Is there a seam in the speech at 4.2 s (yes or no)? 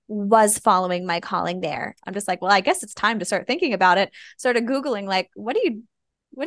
no